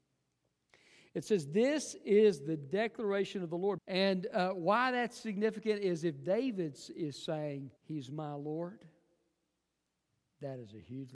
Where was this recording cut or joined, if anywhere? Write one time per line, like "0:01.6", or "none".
0:03.8
0:07.8